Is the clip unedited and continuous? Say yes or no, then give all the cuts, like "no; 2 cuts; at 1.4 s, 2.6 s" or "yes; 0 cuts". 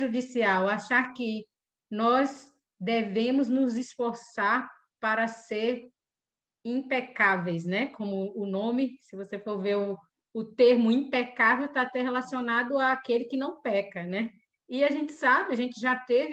yes; 0 cuts